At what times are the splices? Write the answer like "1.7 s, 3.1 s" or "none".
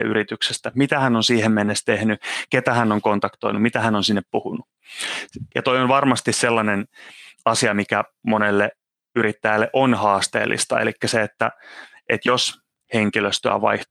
5.5 s